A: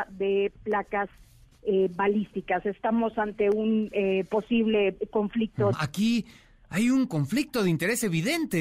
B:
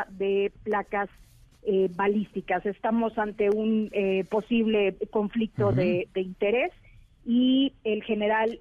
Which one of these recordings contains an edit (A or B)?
A